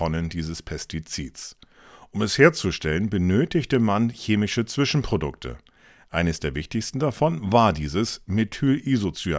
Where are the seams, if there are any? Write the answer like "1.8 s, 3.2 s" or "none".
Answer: none